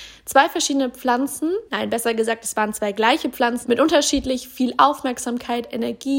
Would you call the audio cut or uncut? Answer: cut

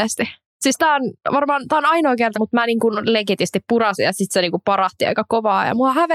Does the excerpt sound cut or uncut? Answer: cut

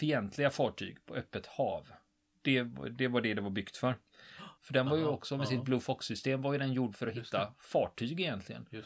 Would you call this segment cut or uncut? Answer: cut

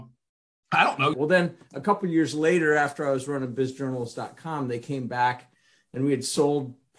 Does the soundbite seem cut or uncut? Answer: cut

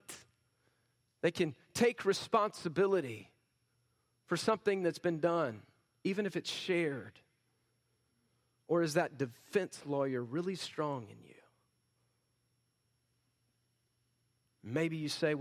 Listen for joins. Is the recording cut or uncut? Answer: uncut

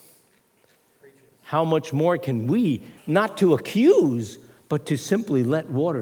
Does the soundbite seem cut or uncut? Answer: cut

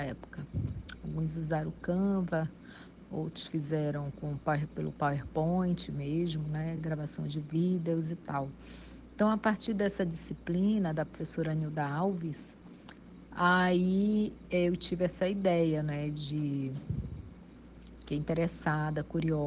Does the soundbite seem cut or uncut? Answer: uncut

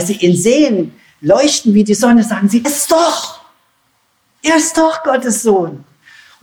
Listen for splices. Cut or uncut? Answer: cut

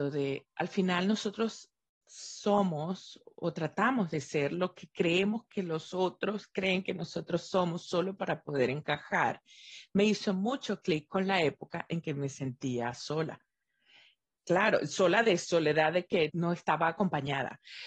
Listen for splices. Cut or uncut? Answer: cut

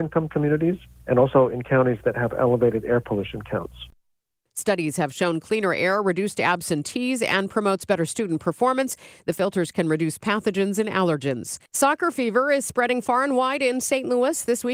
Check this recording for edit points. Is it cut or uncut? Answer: cut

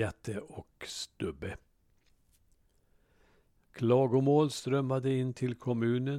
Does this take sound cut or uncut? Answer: cut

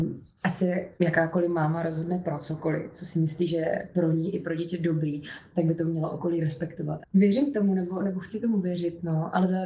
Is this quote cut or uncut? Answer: cut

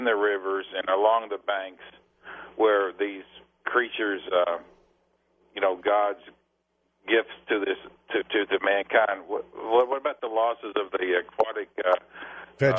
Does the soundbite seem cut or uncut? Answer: uncut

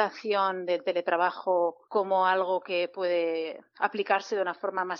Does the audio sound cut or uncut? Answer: cut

